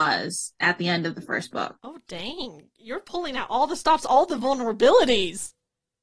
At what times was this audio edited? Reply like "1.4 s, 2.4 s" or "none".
1.8 s